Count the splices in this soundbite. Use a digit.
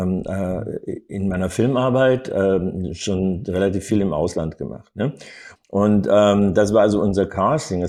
1